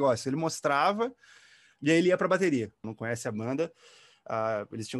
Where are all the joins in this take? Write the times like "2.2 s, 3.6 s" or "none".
2.8 s